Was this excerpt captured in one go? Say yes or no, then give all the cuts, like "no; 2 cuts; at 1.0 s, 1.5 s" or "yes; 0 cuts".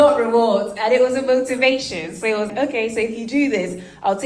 no; 1 cut; at 2.5 s